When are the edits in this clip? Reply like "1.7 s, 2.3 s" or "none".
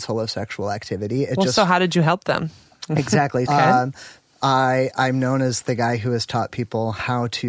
3.5 s